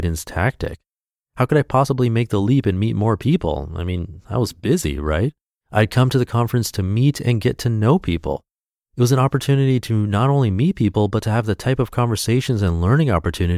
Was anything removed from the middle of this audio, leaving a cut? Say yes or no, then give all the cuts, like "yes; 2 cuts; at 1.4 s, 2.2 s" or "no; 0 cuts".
yes; 1 cut; at 5.6 s